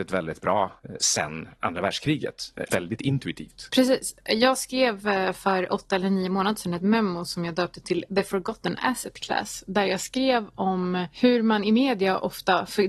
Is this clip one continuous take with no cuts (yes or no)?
no